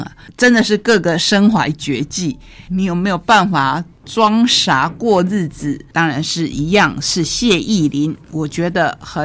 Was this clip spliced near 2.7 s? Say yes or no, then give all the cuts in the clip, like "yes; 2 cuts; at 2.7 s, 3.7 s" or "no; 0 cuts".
yes; 2 cuts; at 2.7 s, 5.9 s